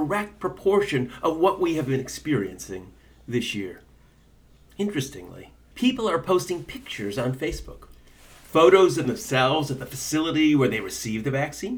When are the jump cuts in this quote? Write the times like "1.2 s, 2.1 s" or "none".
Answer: 5.7 s